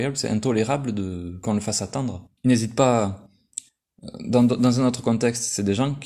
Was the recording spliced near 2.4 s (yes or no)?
yes